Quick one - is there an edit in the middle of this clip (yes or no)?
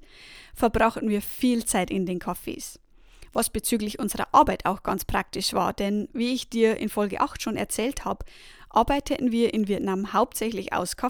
no